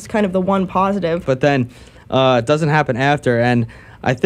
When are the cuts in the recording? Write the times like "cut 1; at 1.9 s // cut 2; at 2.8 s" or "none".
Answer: cut 1; at 1.2 s